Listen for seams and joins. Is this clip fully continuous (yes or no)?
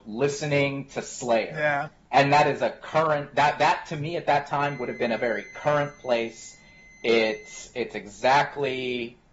yes